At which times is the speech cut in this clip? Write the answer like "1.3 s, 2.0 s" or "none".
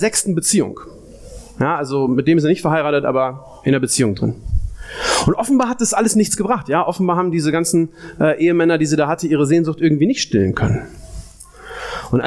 none